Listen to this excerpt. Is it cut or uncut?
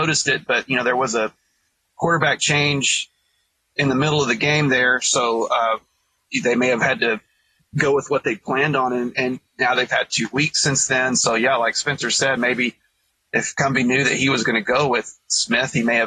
uncut